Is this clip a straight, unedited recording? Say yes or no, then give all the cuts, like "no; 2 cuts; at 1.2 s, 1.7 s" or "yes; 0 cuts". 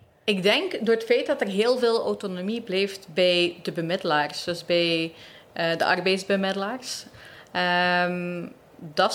yes; 0 cuts